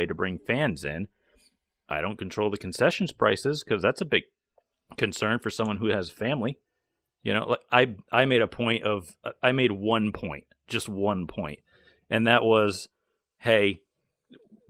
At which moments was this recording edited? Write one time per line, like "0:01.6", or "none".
none